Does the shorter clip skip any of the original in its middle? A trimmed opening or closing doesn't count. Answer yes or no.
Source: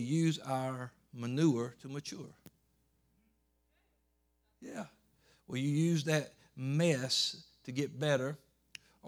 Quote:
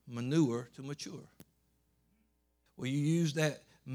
yes